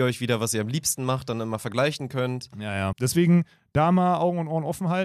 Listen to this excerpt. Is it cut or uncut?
cut